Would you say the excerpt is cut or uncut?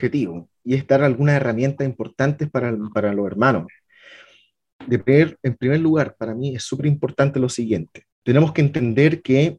cut